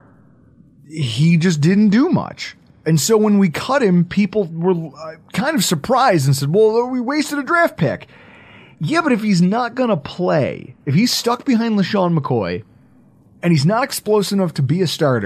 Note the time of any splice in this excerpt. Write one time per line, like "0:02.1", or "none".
none

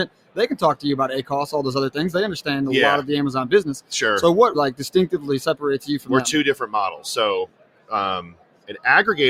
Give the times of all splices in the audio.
0:04.5

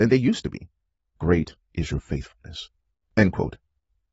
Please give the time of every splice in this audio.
0:01.0

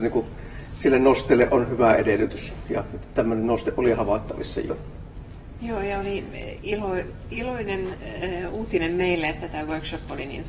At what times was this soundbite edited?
0:05.6

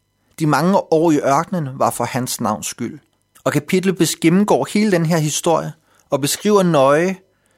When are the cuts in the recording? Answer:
0:03.3

